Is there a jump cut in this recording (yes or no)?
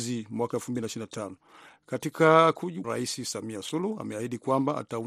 yes